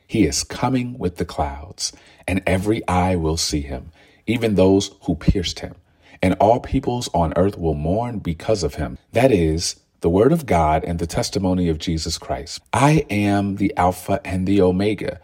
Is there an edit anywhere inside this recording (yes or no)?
yes